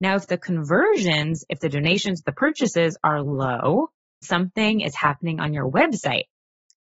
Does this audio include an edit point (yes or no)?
yes